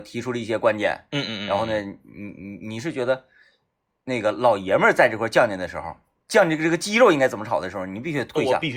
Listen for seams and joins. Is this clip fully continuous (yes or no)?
yes